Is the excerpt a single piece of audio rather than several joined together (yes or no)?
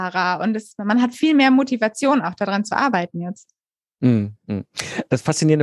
yes